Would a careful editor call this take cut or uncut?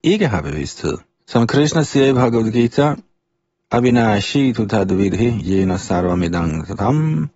cut